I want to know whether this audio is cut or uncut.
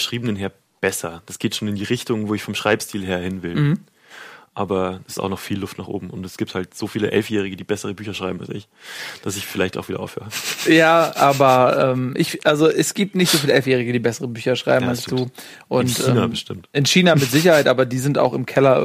uncut